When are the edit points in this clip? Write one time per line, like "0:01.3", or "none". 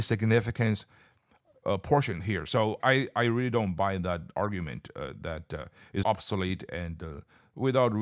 0:02.8
0:06.0